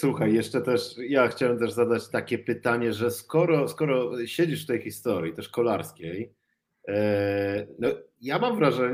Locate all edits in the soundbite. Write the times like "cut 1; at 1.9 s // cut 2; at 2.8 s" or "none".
none